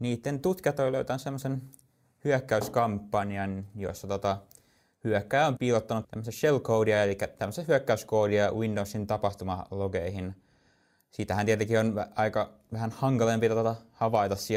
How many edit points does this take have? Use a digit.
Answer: 1